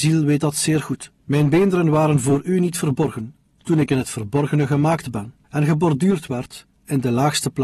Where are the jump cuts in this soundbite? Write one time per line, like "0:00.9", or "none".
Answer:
0:01.2